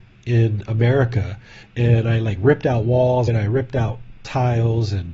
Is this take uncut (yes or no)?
no